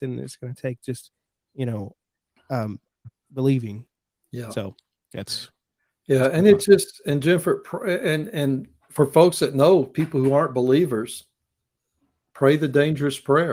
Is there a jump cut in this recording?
no; 0 cuts

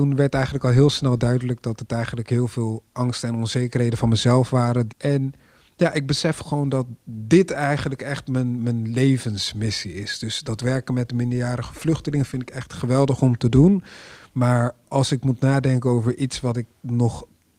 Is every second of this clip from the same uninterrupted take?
no; 1 cut; at 4.9 s

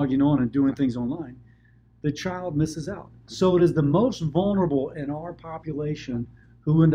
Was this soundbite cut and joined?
no; 0 cuts

